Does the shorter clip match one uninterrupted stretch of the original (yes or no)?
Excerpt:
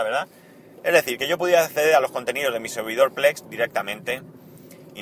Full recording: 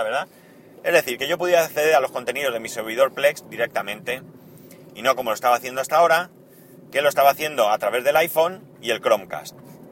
yes